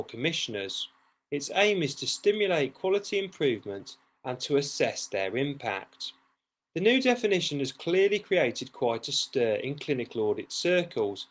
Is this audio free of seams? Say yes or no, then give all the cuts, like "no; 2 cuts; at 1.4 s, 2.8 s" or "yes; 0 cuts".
yes; 0 cuts